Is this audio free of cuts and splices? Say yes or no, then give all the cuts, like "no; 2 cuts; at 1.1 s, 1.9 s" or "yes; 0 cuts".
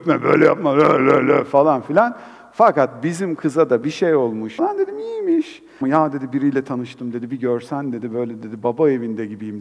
no; 2 cuts; at 4.6 s, 5.8 s